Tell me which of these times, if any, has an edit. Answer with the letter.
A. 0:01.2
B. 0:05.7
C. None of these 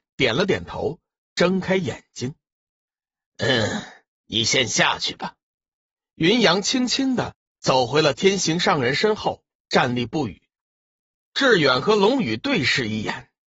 C